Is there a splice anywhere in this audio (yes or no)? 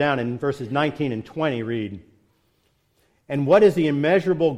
no